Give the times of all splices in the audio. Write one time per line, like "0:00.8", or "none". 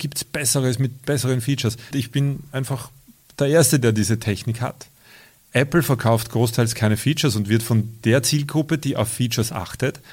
0:01.9

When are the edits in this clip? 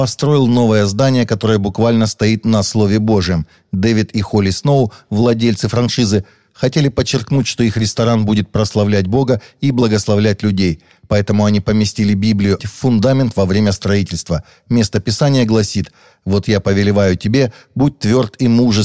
0:12.6

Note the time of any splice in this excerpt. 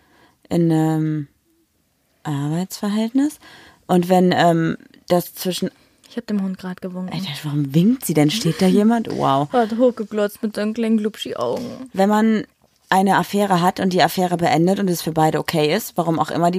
none

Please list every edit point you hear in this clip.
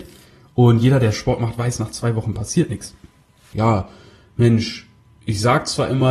0:03.5

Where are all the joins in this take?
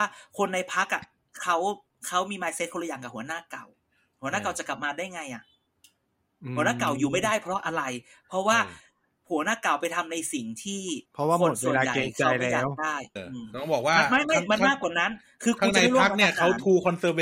0:11.1
0:13.2

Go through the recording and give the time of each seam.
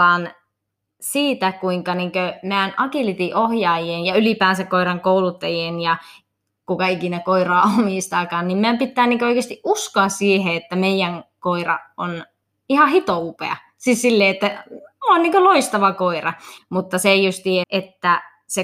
0:16.6
0:17.6

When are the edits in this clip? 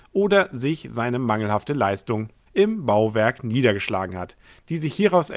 0:02.5

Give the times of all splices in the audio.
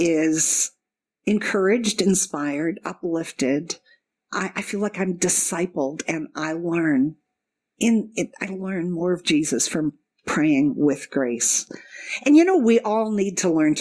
none

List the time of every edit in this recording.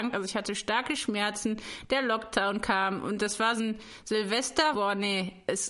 0:03.6
0:04.7

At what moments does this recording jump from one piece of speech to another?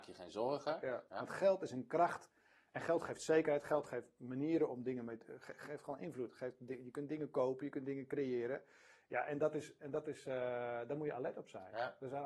0:01.1

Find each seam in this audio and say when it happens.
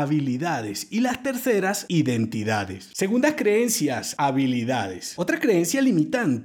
0:02.9

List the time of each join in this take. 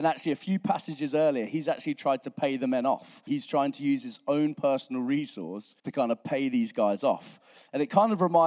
0:03.3
0:05.8

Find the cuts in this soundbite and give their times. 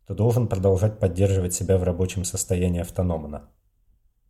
none

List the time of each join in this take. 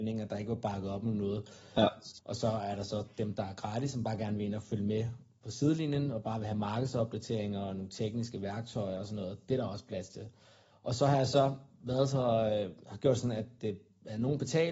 0:02.2
0:10.7

